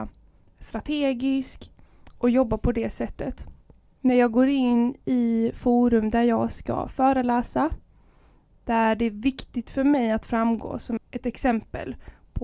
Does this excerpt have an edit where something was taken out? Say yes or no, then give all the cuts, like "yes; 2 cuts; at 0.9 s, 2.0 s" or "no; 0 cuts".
yes; 2 cuts; at 4.0 s, 11.0 s